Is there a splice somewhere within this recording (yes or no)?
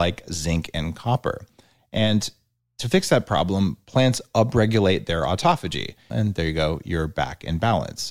yes